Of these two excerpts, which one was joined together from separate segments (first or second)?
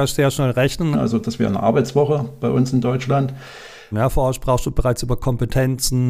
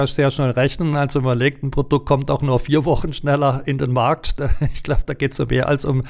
first